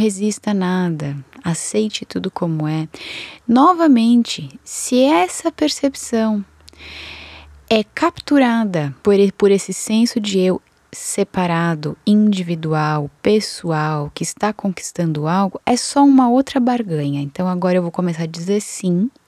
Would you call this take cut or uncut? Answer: cut